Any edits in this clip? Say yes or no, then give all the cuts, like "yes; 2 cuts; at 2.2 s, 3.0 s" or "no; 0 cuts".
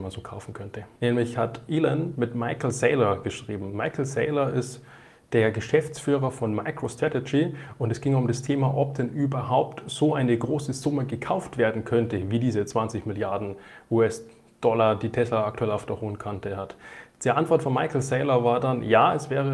yes; 1 cut; at 1.0 s